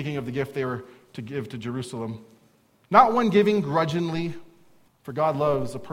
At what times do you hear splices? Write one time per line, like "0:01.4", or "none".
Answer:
0:04.9